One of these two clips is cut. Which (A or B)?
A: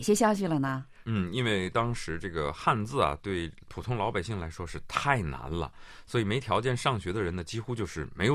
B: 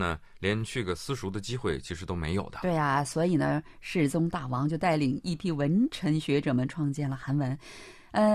A